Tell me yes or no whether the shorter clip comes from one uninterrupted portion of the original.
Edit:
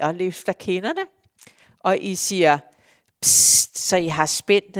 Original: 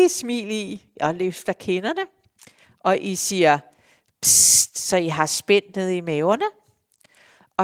yes